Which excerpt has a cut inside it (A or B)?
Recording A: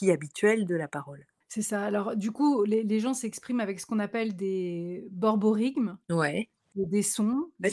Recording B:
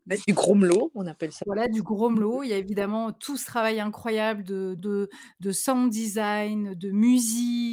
B